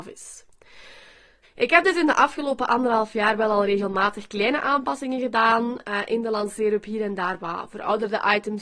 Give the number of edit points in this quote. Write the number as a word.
one